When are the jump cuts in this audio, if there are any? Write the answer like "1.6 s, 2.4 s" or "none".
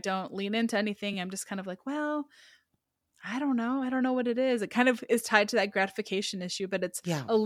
none